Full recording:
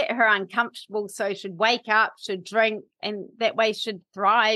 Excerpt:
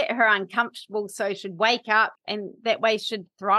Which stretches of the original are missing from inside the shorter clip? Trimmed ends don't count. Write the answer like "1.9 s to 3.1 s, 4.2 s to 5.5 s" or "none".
2.2 s to 2.9 s